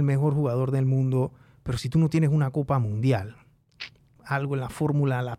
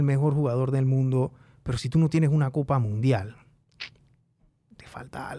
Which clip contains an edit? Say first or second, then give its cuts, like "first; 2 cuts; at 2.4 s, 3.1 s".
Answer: first; 1 cut; at 4.2 s